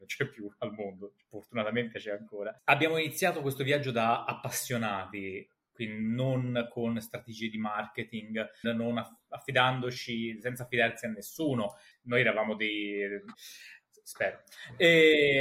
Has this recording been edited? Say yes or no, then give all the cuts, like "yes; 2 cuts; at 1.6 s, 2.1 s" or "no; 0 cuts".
yes; 3 cuts; at 8.6 s, 11.9 s, 13.3 s